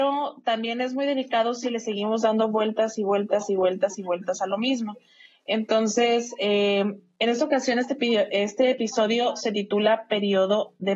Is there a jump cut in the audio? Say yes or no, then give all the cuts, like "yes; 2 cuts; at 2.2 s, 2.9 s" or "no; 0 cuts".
no; 0 cuts